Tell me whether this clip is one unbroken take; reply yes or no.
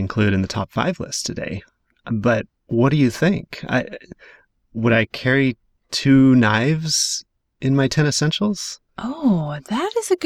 yes